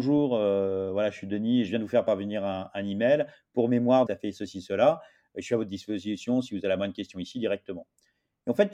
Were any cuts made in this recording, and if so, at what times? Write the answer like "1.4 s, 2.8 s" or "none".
4.1 s